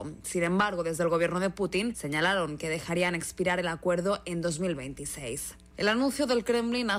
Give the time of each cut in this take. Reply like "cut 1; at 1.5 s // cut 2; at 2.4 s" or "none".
cut 1; at 5.7 s